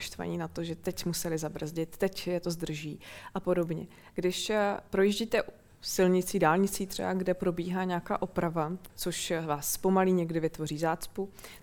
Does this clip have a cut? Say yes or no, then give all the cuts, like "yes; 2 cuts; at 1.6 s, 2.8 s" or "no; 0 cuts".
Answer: yes; 2 cuts; at 4.1 s, 8.9 s